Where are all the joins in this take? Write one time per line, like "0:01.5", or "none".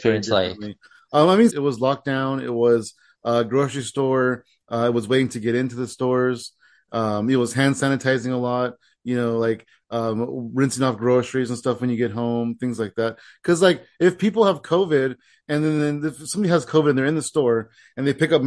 0:01.5